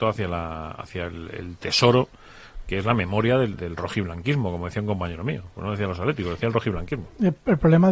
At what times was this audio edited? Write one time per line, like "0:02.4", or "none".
0:03.6